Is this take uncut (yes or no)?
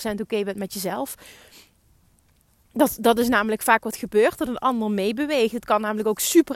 yes